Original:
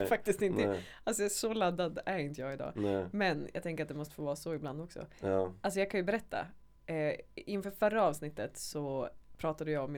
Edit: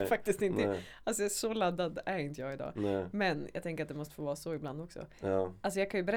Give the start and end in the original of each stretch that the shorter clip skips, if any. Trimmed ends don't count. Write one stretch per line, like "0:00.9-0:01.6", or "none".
none

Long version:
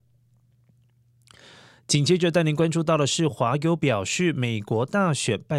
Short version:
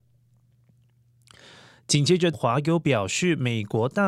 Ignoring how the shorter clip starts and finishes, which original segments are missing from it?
0:02.3-0:03.3

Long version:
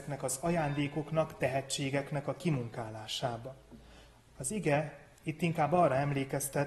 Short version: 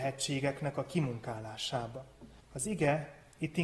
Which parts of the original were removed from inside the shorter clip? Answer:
0:03.9-0:04.3

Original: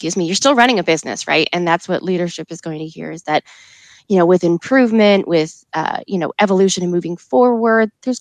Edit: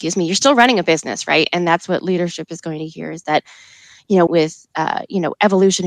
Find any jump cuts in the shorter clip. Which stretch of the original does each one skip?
0:04.3-0:05.2

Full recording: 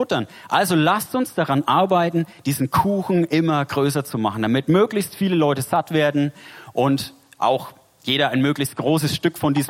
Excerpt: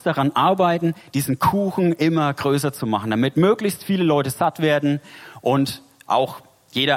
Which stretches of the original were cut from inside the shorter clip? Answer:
none

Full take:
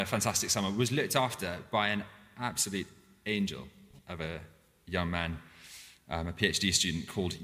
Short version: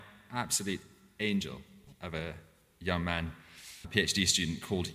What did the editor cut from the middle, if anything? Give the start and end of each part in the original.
0:05.9-0:06.3

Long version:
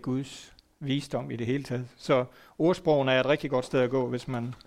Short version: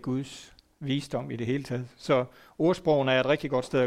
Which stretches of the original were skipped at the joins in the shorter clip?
none

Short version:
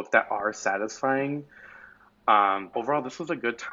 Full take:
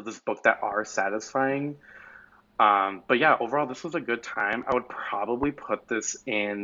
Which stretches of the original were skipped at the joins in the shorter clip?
0:03.0-0:03.4

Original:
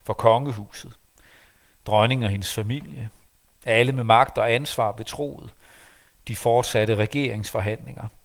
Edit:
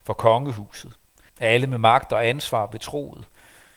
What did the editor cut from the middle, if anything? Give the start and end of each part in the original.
0:01.3-0:03.5

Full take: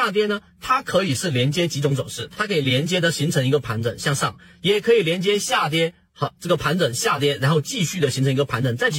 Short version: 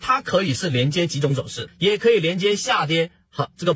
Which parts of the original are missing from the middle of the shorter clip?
0:02.3-0:04.5

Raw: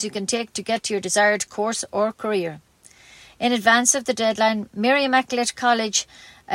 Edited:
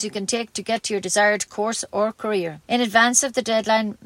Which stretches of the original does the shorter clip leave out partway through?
0:02.6-0:03.4

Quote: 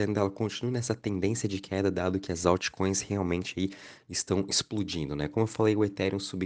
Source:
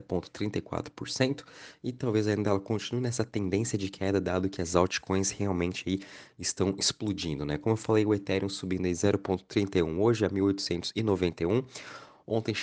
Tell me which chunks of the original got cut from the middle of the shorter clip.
none

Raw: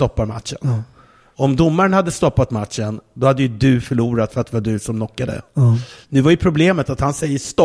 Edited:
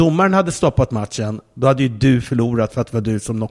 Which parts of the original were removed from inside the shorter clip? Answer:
none

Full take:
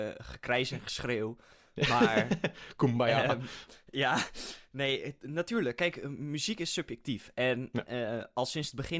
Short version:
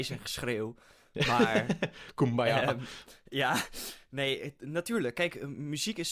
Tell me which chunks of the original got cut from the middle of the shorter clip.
none

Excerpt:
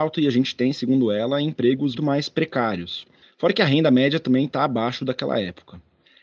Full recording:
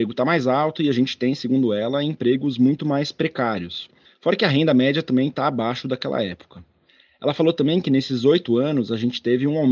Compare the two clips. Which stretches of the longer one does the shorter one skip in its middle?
0:02.6-0:02.8

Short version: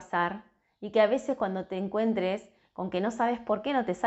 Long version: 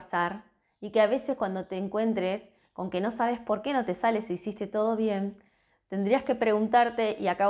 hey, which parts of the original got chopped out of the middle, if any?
none

